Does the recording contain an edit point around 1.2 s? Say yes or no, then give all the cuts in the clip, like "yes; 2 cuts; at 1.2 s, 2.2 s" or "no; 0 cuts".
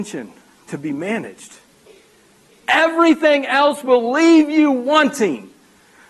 no; 1 cut; at 2.6 s